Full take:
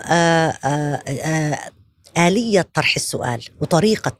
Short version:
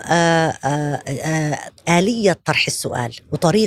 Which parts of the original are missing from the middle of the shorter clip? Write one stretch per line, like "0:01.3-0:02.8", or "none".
0:01.8-0:02.1